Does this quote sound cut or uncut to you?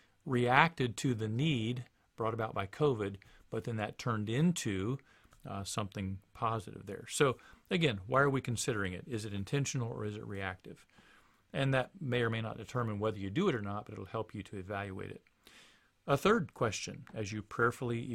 uncut